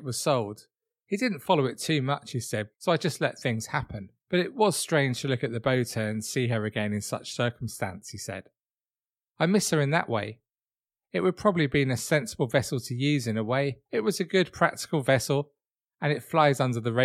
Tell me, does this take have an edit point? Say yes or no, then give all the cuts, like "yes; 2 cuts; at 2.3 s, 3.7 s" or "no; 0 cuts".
yes; 3 cuts; at 2.7 s, 4.2 s, 13.9 s